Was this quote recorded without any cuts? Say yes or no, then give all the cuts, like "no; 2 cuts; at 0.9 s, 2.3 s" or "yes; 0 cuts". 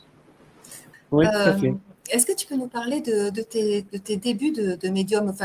no; 1 cut; at 0.9 s